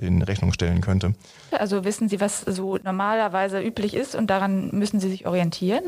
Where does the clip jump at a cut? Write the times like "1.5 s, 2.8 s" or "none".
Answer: 1.5 s